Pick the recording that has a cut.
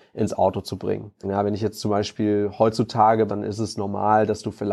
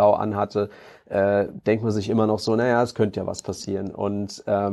first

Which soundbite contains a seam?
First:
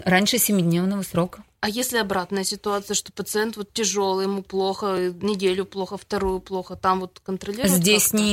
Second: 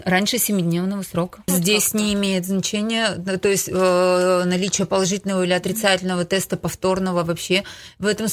second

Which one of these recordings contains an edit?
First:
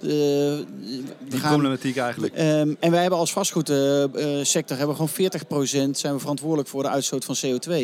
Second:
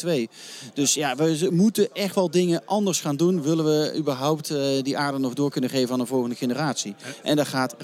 first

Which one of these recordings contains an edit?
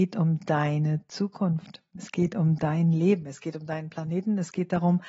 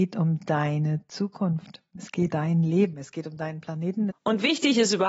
second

